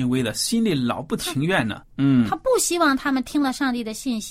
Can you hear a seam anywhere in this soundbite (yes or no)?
yes